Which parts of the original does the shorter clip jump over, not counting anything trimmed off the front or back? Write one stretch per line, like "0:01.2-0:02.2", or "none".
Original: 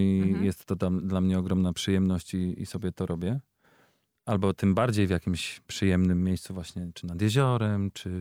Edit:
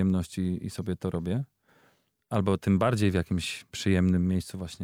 none